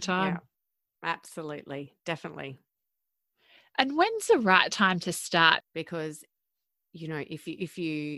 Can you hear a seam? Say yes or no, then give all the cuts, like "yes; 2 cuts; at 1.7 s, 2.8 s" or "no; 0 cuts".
yes; 1 cut; at 5.6 s